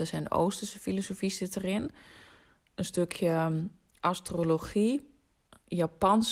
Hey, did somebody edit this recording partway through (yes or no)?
no